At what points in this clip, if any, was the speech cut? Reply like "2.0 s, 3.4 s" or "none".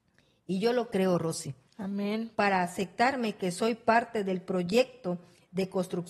2.3 s

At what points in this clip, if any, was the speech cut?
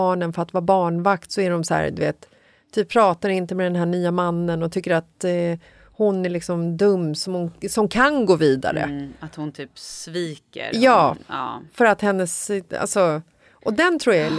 none

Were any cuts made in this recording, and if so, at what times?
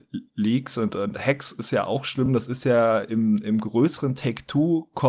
none

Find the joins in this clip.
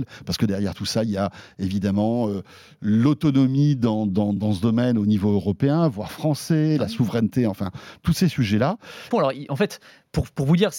4.4 s, 9.1 s

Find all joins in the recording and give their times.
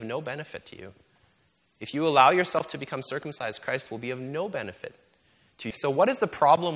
5.7 s

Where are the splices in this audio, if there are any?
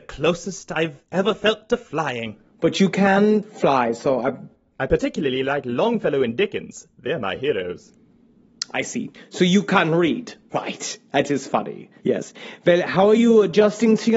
10.5 s, 12.0 s

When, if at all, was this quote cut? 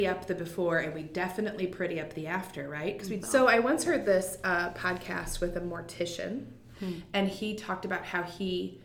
3.2 s, 6.7 s

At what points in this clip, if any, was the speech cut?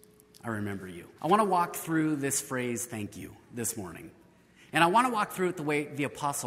1.2 s

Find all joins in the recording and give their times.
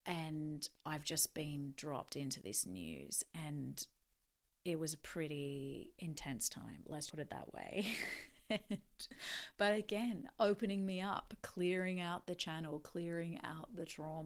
7.1 s

